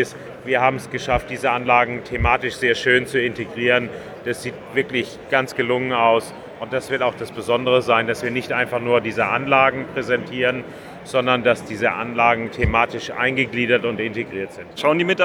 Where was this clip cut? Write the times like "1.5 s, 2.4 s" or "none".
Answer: none

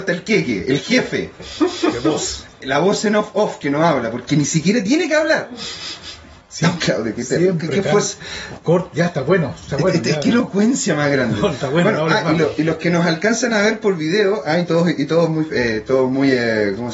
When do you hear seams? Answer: 6.4 s

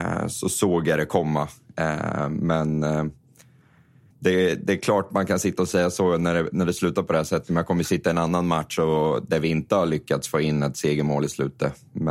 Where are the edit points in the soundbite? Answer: 4.1 s

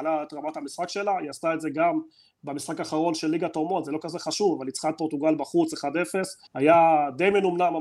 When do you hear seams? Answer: 6.5 s

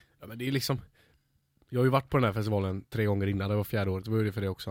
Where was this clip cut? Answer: none

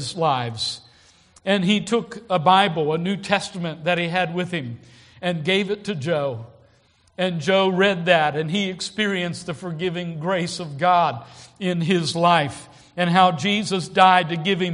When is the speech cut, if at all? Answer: none

